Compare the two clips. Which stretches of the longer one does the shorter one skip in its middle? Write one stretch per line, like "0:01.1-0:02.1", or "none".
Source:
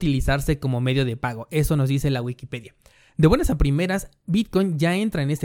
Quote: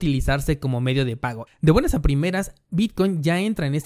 0:01.5-0:03.0